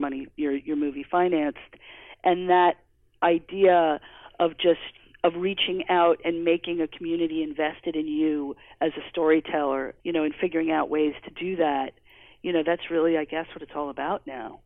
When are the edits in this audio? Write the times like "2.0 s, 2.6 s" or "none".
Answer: 10.0 s